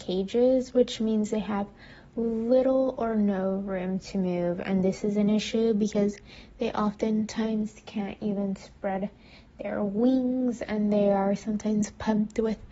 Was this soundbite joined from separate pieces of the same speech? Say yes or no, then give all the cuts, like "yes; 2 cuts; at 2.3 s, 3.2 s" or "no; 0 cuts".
no; 0 cuts